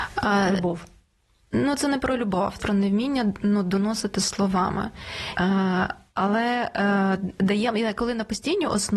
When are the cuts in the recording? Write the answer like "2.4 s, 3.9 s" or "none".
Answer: 2.6 s, 5.4 s